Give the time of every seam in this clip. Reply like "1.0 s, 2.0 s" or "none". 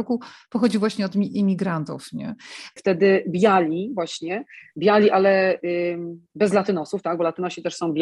2.8 s

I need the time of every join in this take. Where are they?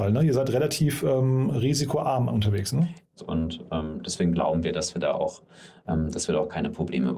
3.2 s

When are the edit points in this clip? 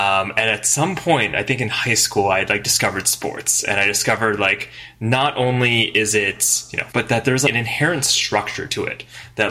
6.9 s

